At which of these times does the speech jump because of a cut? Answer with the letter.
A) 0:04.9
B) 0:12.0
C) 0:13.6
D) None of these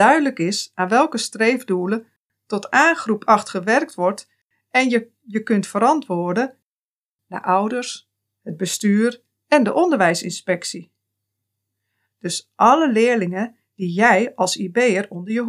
B